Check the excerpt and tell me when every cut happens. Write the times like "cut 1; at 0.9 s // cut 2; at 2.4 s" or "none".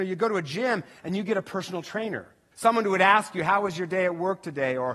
cut 1; at 2.5 s